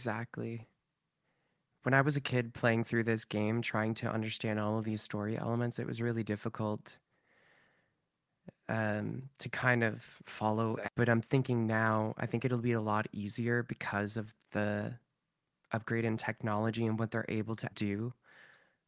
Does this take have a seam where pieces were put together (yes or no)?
yes